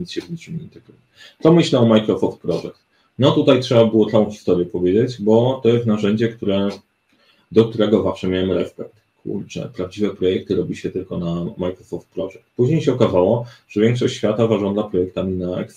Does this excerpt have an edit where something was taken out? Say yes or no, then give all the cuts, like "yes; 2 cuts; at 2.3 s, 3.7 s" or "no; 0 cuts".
no; 0 cuts